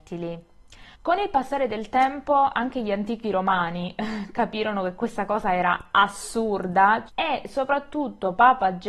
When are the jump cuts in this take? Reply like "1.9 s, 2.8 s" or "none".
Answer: 0.9 s, 7.1 s